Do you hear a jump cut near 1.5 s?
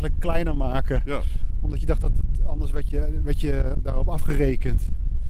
no; 0 cuts

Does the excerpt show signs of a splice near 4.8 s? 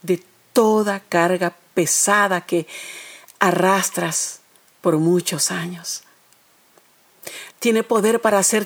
no; 1 cut; at 7.5 s

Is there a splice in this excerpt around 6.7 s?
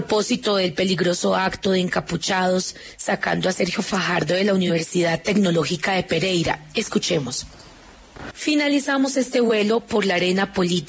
no; 1 cut; at 8.3 s

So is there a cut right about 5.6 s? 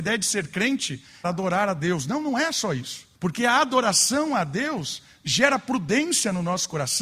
no; 2 cuts; at 1.2 s, 3.1 s

